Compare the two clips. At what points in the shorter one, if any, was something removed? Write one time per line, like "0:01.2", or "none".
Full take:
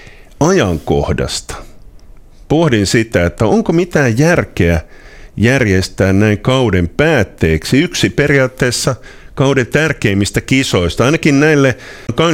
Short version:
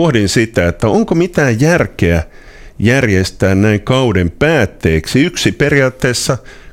none